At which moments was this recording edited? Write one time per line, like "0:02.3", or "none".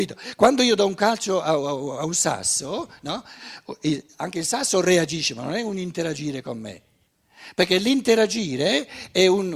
none